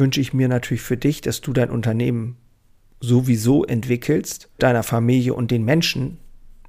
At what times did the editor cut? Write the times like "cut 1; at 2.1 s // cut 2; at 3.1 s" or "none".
cut 1; at 4.6 s

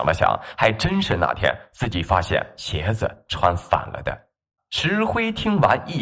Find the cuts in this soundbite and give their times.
cut 1; at 4.6 s

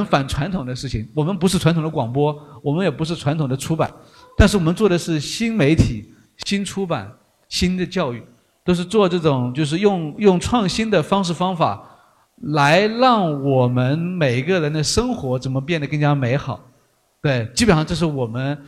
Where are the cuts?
none

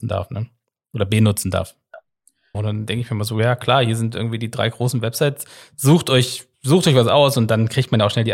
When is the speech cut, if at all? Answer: cut 1; at 2.5 s

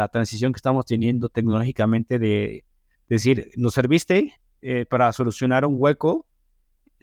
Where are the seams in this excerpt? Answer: none

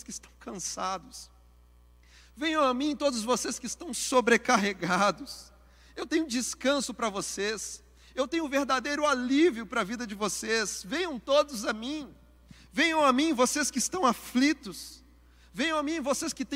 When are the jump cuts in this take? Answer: none

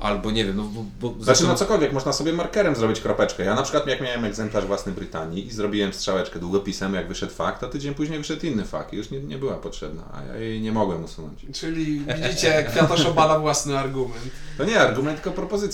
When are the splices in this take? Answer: none

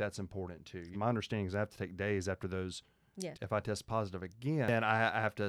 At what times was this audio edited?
cut 1; at 0.9 s // cut 2; at 3.3 s

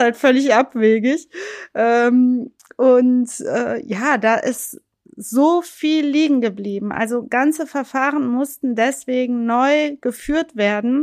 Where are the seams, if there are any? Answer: none

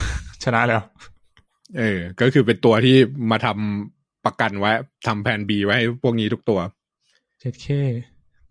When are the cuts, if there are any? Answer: none

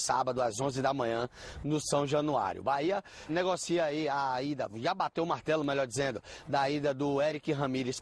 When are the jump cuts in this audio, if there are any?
cut 1; at 3.3 s

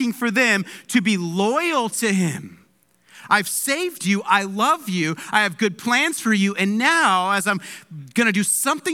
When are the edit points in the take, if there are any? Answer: none

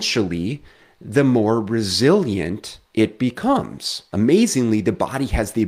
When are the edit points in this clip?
cut 1; at 2.8 s // cut 2; at 4.1 s

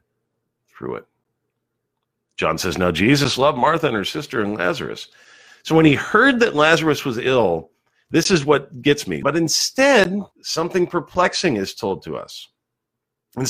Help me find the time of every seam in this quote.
cut 1; at 9.2 s // cut 2; at 10.3 s

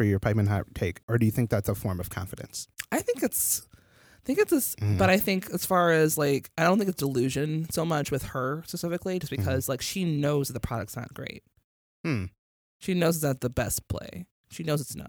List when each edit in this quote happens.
cut 1; at 1.0 s // cut 2; at 4.7 s

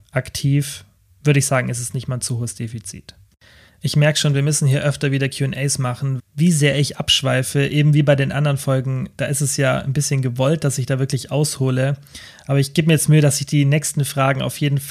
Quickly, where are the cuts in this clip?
cut 1; at 6.2 s

